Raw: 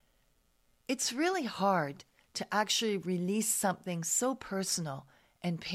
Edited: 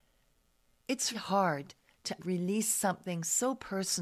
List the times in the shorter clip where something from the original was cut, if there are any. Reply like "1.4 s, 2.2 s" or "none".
1.1 s, 2.2 s